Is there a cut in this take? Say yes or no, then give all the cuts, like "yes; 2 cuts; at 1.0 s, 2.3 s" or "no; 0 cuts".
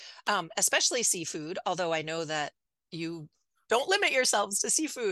no; 0 cuts